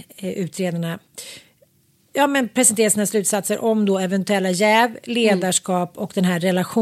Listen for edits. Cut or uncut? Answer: uncut